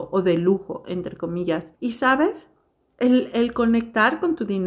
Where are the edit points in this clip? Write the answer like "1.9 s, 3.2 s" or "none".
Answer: 1.7 s, 3.3 s